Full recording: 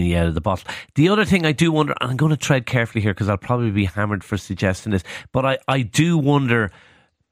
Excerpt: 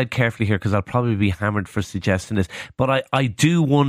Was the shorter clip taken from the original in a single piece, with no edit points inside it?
yes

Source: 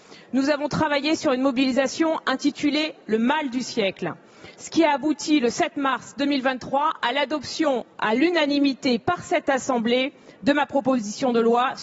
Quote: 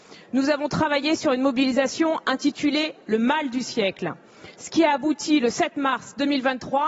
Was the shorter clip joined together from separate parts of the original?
no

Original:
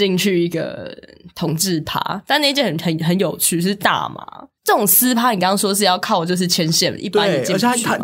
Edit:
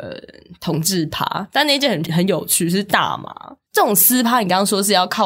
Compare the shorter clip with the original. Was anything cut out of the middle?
yes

